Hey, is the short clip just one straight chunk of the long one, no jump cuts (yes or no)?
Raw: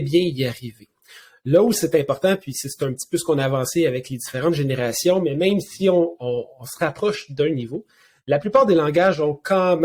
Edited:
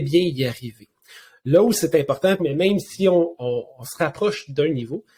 no